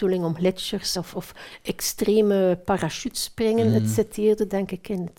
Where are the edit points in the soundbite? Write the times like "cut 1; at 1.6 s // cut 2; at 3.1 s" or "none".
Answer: none